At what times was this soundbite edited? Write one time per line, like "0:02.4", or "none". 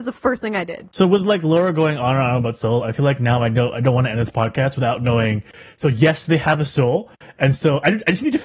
none